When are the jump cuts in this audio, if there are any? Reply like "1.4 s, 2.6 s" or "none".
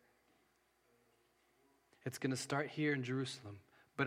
1.9 s